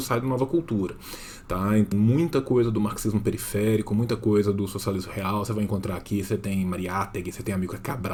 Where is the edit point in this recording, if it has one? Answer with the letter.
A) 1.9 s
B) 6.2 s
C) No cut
A